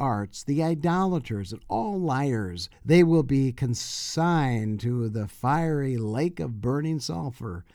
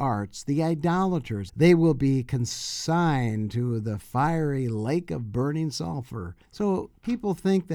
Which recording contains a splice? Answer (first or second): second